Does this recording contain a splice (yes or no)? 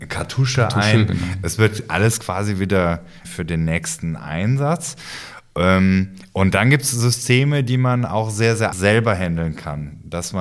yes